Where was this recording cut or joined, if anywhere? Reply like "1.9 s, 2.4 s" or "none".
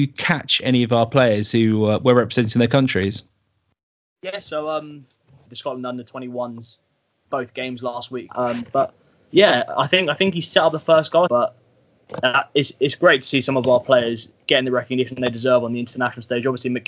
5.5 s, 8.3 s, 11.3 s